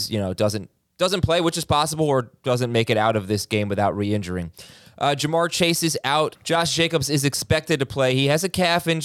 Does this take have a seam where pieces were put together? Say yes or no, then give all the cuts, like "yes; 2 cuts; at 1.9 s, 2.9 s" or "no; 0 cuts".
yes; 1 cut; at 6.4 s